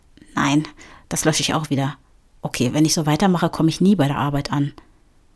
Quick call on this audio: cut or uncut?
uncut